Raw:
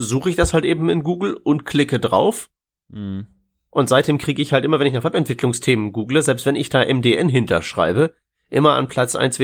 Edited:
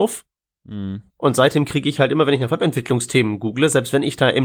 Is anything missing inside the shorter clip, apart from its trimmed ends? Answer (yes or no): yes